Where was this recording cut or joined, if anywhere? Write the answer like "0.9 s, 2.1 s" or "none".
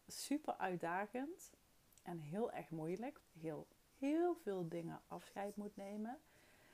3.2 s